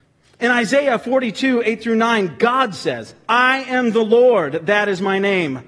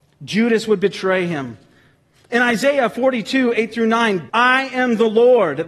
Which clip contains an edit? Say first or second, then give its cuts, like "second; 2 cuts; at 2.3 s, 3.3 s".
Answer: second; 1 cut; at 4.3 s